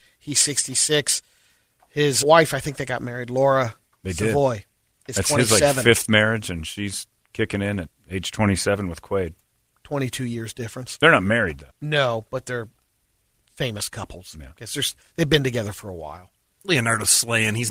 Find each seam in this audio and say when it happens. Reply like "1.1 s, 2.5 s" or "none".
2.2 s, 9.7 s, 11.7 s